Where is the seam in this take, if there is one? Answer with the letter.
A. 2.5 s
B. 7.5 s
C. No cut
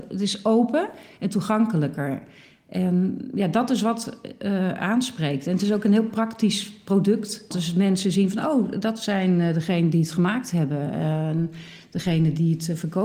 B